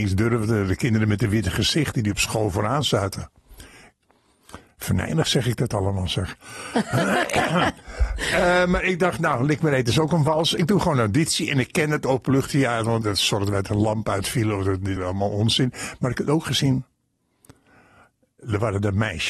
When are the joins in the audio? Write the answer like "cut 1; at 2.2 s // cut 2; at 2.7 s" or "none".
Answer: cut 1; at 13.0 s // cut 2; at 15.0 s